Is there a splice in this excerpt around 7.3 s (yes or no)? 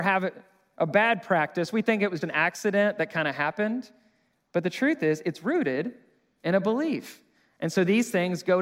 no